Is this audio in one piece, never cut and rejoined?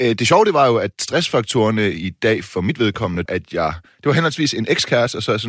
no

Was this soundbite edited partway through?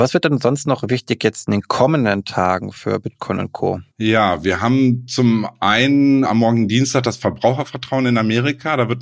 yes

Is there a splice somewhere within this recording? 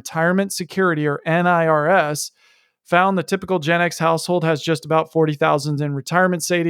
no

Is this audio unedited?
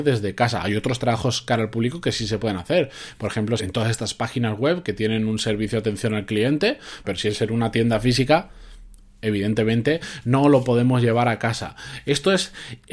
no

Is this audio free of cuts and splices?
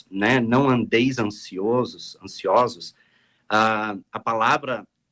yes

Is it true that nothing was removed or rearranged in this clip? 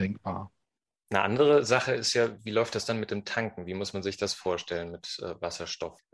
no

